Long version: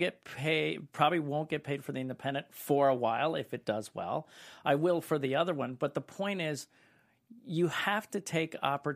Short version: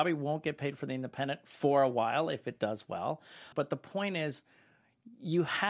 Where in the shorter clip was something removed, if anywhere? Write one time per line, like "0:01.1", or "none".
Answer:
0:03.5